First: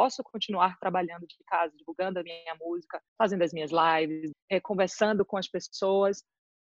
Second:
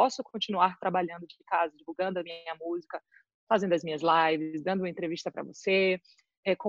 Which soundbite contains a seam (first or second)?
first